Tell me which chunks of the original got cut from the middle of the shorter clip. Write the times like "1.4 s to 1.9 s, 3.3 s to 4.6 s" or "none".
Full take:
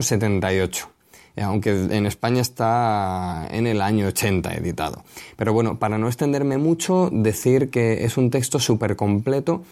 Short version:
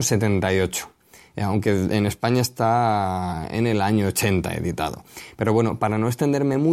none